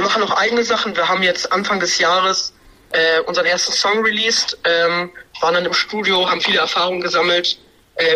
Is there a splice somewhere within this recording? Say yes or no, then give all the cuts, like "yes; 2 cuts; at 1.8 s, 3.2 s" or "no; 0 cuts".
no; 0 cuts